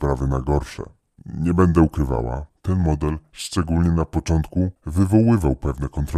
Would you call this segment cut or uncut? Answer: uncut